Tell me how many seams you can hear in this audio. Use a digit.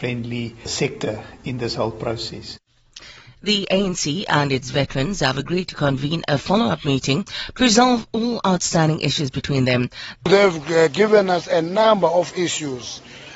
1